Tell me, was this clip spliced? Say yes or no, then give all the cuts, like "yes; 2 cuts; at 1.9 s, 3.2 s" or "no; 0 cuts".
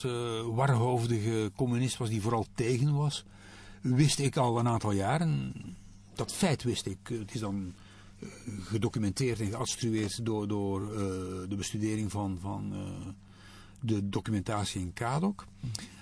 no; 0 cuts